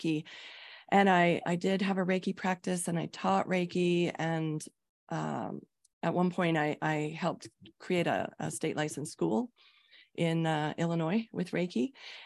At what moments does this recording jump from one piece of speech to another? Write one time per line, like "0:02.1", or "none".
none